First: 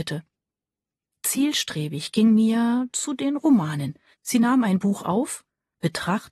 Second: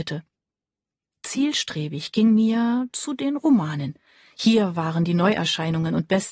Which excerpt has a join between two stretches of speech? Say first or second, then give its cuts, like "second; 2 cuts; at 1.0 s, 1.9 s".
first; 1 cut; at 4.1 s